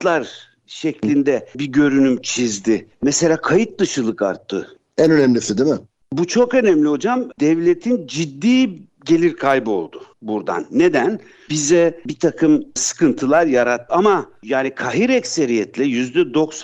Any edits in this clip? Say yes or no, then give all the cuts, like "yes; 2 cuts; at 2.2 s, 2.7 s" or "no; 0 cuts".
yes; 3 cuts; at 10.1 s, 11.5 s, 13.9 s